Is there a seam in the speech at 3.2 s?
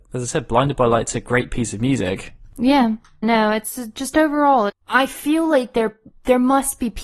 yes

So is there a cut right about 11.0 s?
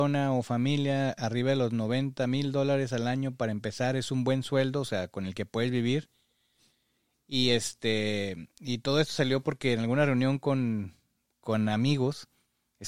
no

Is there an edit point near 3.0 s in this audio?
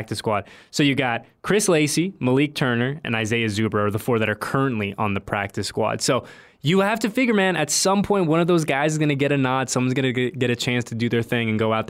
yes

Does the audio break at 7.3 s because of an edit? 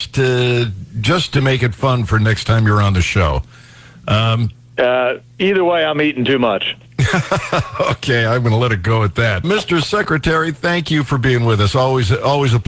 no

